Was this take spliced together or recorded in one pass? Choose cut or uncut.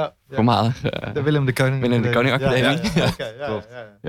uncut